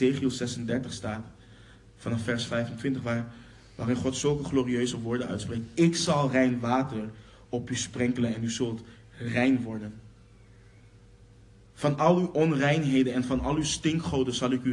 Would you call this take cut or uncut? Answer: uncut